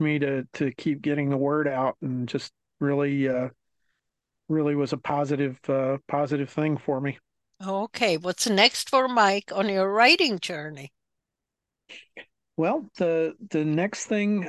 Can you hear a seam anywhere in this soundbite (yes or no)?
no